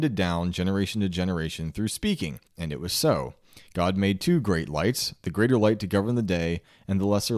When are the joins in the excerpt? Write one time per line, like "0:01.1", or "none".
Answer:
0:02.5